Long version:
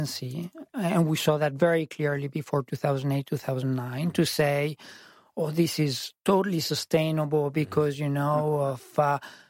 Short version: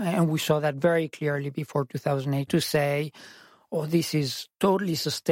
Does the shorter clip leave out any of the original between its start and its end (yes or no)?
yes